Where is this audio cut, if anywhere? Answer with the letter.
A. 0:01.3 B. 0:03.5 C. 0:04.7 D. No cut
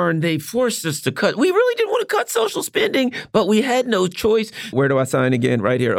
C